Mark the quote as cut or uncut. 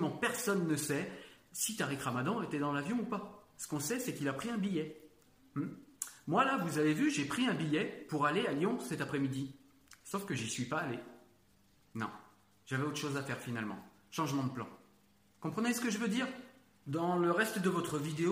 uncut